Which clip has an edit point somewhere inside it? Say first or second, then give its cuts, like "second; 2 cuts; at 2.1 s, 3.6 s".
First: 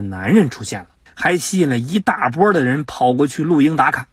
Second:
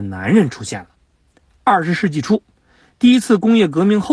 first; 1 cut; at 1.1 s